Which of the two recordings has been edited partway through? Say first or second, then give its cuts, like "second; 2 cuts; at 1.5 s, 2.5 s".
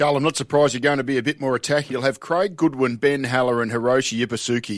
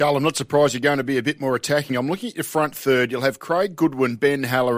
first; 1 cut; at 1.9 s